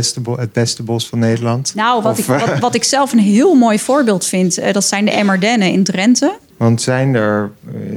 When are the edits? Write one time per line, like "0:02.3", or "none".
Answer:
0:06.5